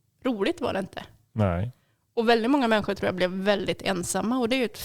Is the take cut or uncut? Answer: uncut